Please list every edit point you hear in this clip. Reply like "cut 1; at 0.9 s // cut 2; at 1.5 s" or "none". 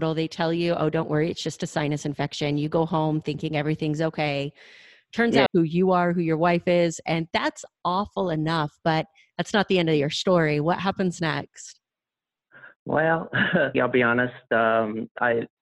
cut 1; at 5.5 s // cut 2; at 13.7 s